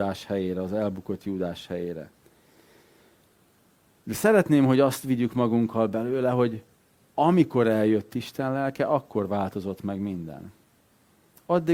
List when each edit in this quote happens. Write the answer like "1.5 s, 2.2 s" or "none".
none